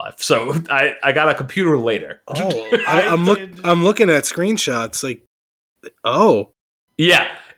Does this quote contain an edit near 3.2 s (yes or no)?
no